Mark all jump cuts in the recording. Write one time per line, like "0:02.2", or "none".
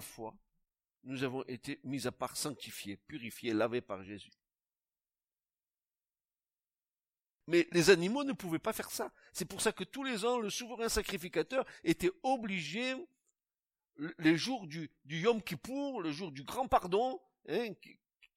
none